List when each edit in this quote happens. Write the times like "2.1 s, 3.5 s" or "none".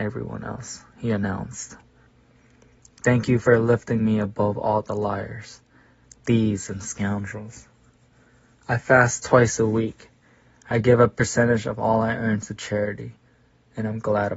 none